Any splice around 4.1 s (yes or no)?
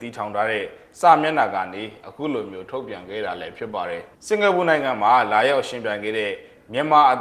yes